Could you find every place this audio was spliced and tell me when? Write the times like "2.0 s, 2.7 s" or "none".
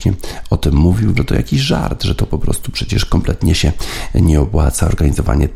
1.2 s